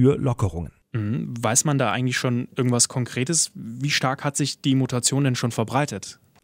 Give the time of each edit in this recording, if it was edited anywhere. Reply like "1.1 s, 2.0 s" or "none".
none